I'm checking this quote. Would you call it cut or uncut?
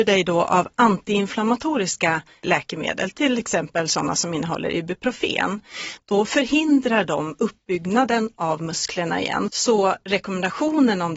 cut